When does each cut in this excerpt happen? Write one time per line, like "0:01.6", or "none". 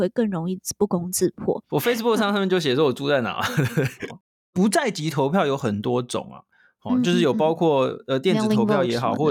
0:01.7
0:04.1